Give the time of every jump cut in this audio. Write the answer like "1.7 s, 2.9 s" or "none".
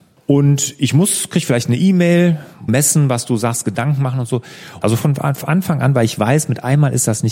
2.7 s, 4.8 s